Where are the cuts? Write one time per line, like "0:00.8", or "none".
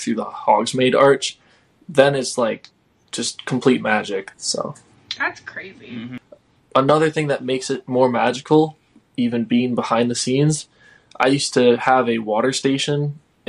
0:04.3